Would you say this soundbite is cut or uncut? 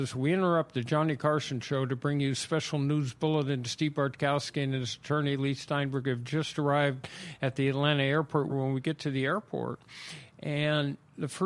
cut